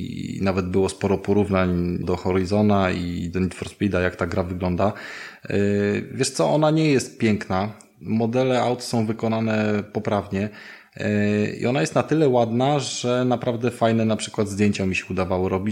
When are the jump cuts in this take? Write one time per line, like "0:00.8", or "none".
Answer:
0:02.0